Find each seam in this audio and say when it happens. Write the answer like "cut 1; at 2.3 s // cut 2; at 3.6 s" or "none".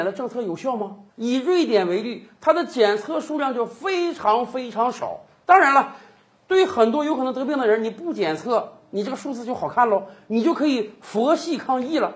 cut 1; at 1.1 s

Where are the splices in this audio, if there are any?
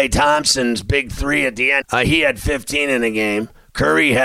cut 1; at 1.8 s

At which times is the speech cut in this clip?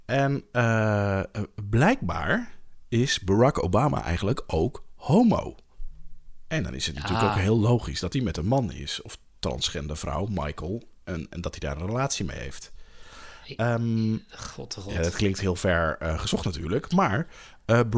none

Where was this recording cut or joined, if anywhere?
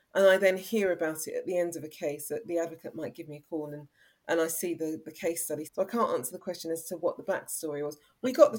cut 1; at 5.6 s

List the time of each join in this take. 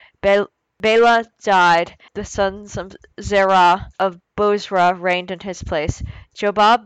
cut 1; at 2.1 s // cut 2; at 4.3 s

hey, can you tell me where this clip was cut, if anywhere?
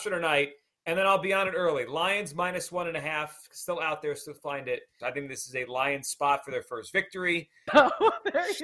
cut 1; at 5.0 s // cut 2; at 7.7 s

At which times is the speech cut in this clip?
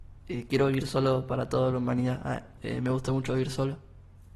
cut 1; at 2.6 s

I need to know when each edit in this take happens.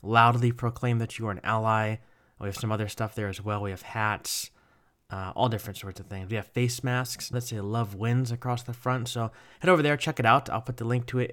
cut 1; at 7.3 s

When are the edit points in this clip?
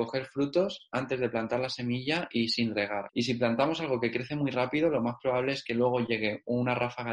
cut 1; at 3.1 s

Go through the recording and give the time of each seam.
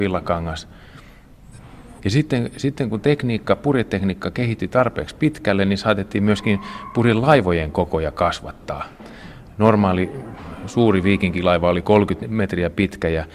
cut 1; at 2.0 s

